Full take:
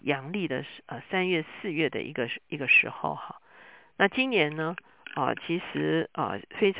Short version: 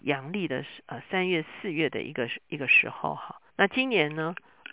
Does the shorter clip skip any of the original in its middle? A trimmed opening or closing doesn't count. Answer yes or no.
yes